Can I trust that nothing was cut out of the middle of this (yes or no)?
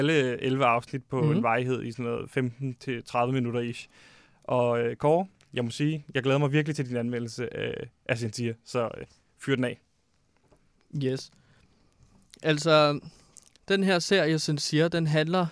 yes